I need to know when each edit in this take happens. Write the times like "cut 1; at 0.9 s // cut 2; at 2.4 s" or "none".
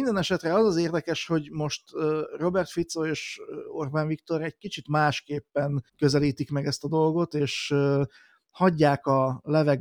cut 1; at 5.9 s